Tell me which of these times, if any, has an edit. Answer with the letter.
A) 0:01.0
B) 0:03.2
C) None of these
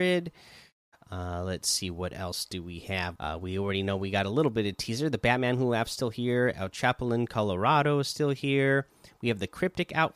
B